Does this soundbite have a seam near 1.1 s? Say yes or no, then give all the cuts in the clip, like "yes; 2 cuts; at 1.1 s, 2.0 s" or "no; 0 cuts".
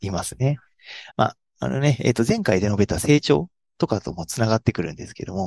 yes; 1 cut; at 1.1 s